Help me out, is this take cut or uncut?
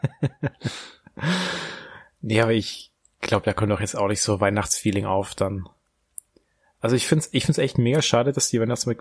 uncut